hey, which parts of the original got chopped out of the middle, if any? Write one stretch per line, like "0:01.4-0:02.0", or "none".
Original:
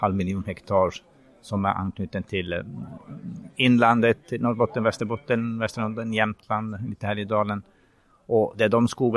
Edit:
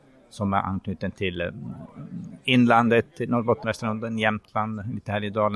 0:04.8-0:05.6